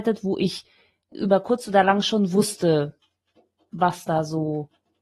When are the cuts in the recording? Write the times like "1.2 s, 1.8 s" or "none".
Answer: 1.1 s